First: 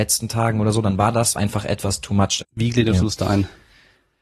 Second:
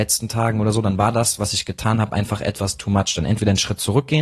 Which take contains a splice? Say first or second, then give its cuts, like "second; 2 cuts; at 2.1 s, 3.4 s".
first; 2 cuts; at 1.3 s, 2.4 s